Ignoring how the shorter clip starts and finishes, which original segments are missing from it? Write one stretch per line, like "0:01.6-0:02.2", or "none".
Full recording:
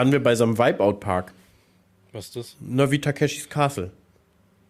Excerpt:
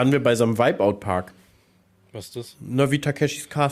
none